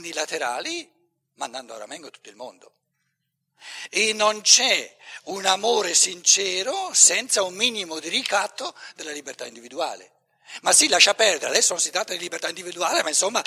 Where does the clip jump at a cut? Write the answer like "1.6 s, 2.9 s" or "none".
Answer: none